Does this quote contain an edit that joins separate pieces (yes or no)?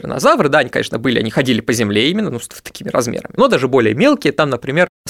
yes